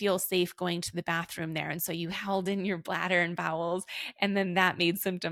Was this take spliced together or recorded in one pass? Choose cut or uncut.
uncut